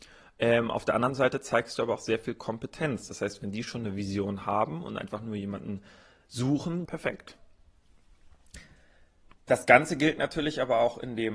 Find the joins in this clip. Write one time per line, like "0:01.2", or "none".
0:06.9